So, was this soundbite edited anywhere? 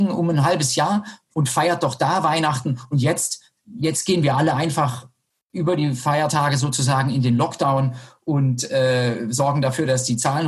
no; 0 cuts

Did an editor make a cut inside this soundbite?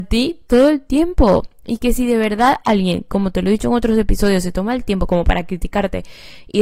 no; 0 cuts

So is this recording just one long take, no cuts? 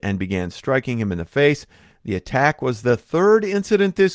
no; 1 cut; at 1.9 s

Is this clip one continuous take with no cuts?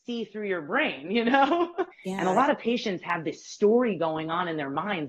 no; 1 cut; at 1.9 s

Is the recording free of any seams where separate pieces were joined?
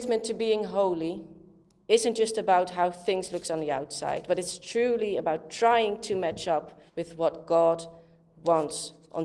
no; 1 cut; at 6.9 s

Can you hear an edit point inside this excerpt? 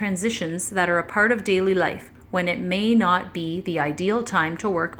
no; 0 cuts

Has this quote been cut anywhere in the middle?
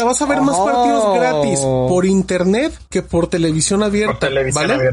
yes; 1 cut; at 2.9 s

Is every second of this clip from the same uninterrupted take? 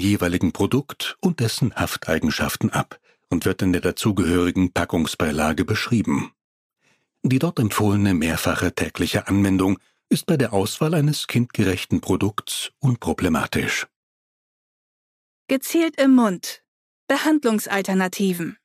yes; 0 cuts

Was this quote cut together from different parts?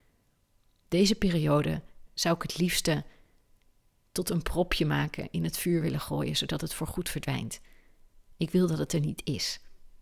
yes; 1 cut; at 2.1 s

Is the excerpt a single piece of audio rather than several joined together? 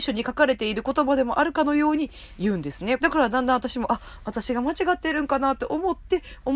no; 1 cut; at 3.0 s

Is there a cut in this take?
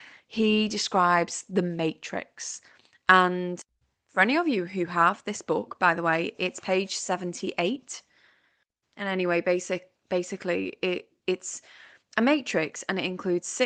no; 0 cuts

